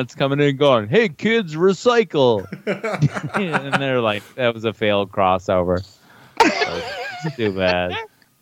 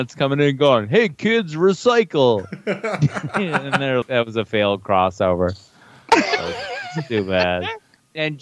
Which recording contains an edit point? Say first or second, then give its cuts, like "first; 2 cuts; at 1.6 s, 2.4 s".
second; 1 cut; at 4.0 s